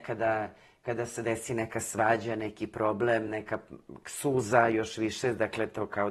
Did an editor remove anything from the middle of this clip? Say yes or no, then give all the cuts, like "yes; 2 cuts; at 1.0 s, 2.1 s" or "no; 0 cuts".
no; 0 cuts